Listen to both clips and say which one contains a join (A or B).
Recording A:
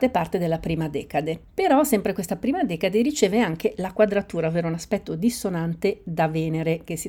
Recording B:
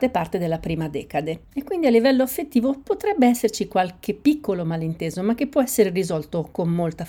B